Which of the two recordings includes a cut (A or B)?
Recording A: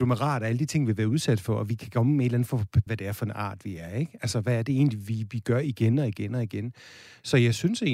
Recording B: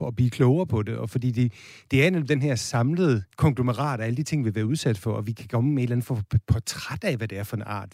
A